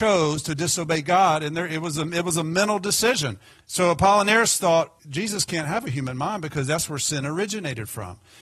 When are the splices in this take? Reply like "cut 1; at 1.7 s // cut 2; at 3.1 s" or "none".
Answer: cut 1; at 3.6 s // cut 2; at 5.0 s